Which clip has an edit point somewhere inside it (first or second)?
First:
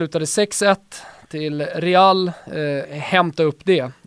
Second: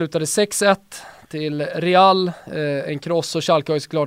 first